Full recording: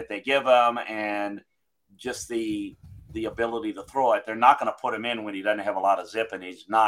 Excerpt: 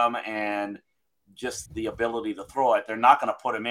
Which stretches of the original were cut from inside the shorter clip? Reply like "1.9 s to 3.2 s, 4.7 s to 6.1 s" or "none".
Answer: 2.3 s to 3.0 s